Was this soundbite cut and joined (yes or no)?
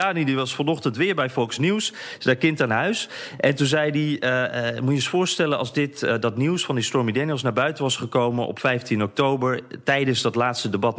no